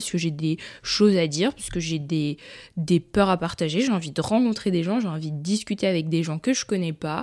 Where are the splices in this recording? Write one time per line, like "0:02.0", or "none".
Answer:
none